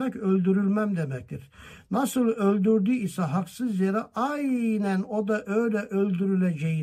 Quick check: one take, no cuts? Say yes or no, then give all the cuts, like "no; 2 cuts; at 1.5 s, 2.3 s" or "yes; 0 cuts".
yes; 0 cuts